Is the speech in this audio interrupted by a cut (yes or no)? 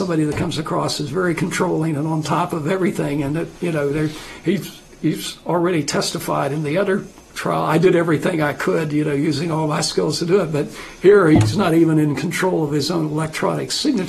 no